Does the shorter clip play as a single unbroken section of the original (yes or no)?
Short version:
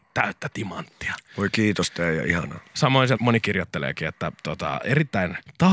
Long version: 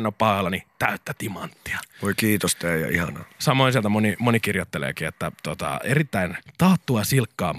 no